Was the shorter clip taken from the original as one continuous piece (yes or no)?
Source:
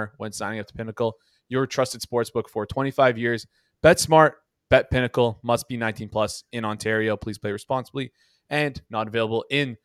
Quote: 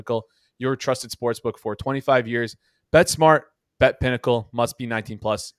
yes